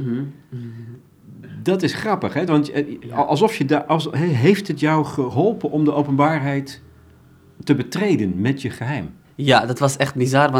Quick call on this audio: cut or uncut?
uncut